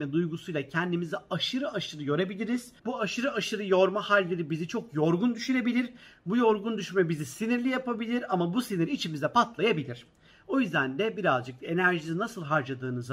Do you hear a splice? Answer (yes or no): yes